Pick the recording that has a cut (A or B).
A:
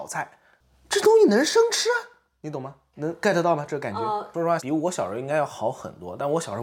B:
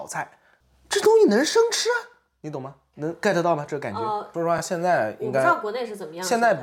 A